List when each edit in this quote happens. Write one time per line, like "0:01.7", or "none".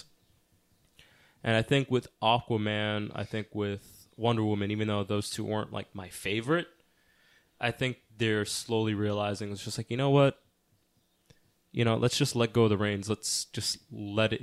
none